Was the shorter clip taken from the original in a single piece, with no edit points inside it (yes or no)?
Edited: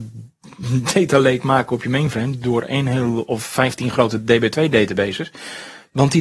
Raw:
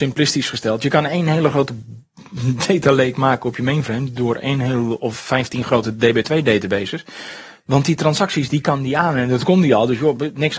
yes